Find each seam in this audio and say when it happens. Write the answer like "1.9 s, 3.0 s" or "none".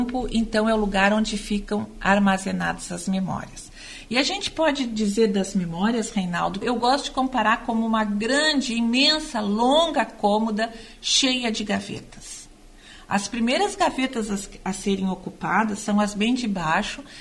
6.6 s